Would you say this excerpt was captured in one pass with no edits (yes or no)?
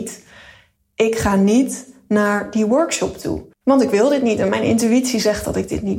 no